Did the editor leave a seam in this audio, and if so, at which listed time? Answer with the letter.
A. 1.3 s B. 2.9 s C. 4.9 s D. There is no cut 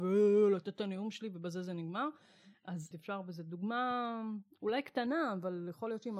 B